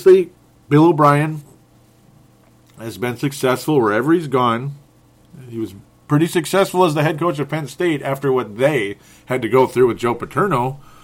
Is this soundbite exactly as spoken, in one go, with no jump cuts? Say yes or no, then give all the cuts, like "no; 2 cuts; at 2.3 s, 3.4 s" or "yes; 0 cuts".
yes; 0 cuts